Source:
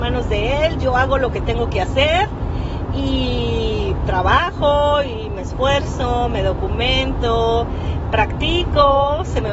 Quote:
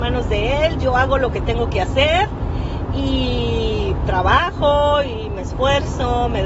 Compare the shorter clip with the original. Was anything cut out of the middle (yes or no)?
no